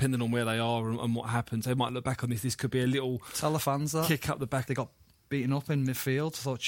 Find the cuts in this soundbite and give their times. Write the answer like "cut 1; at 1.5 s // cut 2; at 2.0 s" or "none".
cut 1; at 4.7 s

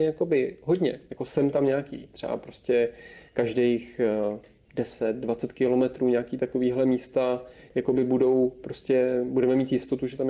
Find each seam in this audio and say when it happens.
none

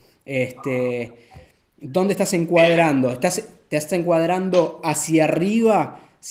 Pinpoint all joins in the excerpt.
none

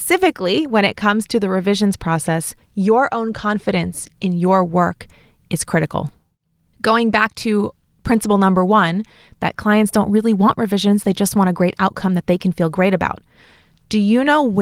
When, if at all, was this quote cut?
none

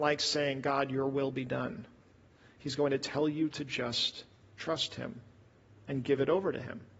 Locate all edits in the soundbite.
none

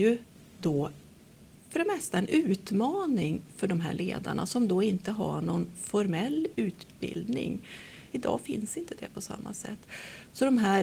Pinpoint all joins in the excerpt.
cut 1; at 8.1 s

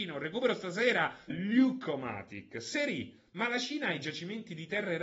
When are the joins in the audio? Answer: cut 1; at 1.3 s

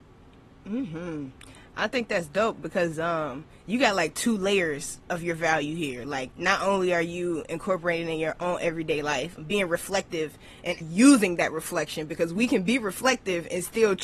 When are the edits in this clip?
cut 1; at 9.4 s // cut 2; at 10.8 s

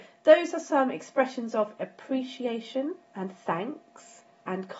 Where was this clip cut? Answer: cut 1; at 3.0 s

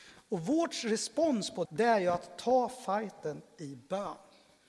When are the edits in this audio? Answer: cut 1; at 1.6 s

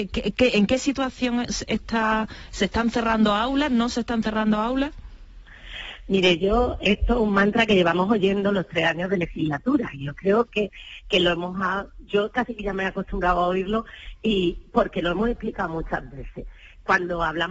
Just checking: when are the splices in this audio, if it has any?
none

